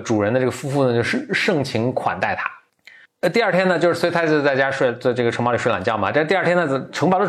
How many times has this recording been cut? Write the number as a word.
zero